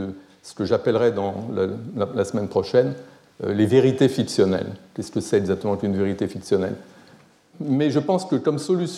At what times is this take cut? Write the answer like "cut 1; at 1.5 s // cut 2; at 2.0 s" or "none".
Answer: cut 1; at 7.5 s